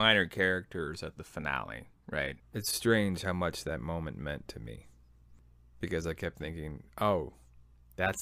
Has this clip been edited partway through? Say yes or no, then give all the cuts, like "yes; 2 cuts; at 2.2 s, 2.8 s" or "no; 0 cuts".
yes; 1 cut; at 2.4 s